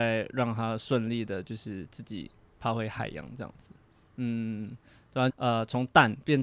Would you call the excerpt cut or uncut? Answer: cut